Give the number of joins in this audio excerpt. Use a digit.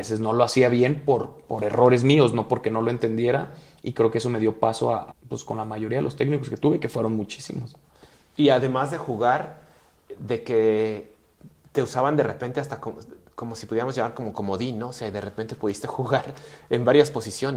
1